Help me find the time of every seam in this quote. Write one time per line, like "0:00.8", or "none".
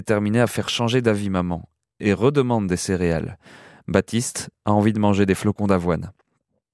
none